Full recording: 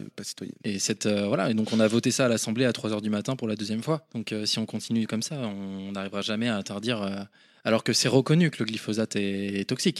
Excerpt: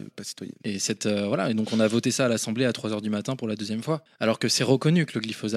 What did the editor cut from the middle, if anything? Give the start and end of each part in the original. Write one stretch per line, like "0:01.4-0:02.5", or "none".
0:04.1-0:07.5